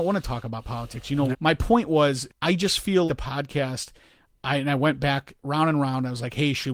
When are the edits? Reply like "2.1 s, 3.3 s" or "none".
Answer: 1.3 s, 3.1 s